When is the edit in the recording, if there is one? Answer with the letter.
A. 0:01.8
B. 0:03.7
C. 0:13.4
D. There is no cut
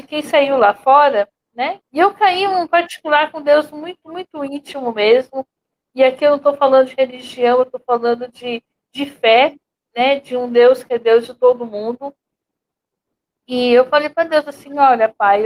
A